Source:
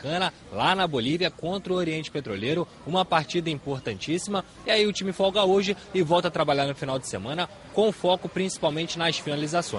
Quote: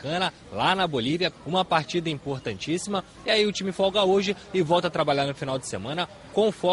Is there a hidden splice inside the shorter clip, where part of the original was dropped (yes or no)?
yes